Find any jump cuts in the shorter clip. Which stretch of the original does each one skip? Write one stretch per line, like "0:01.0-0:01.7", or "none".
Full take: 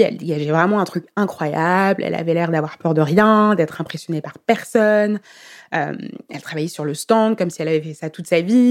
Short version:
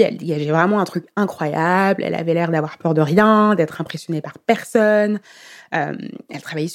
none